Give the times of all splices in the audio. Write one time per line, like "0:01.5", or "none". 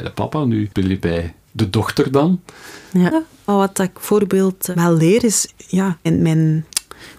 0:03.1
0:05.5